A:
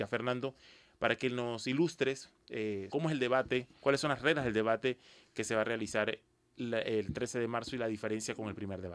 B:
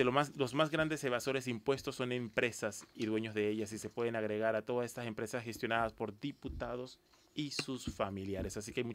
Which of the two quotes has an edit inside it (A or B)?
A